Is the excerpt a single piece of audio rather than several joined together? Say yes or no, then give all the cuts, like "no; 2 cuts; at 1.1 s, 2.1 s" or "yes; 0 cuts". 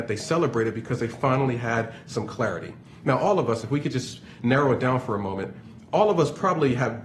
no; 1 cut; at 3.6 s